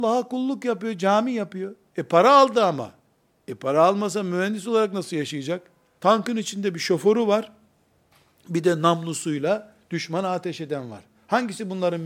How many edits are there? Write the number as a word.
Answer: one